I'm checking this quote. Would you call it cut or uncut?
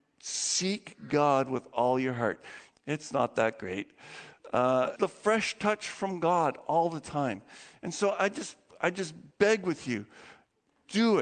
cut